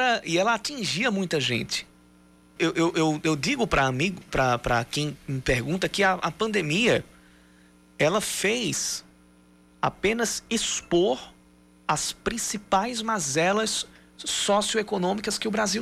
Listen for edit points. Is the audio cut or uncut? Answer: cut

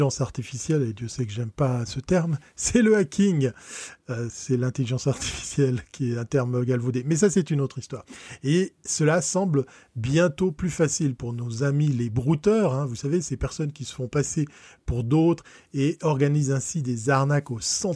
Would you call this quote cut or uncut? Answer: cut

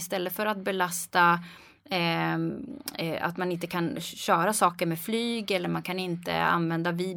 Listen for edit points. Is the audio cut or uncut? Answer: uncut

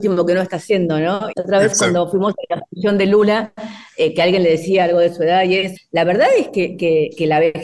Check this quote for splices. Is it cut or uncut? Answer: cut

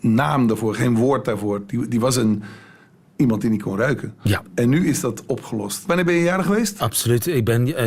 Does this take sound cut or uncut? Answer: cut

